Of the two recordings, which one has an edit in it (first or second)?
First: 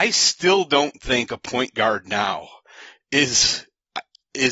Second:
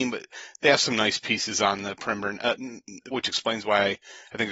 second